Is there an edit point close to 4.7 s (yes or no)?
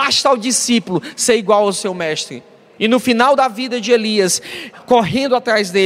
yes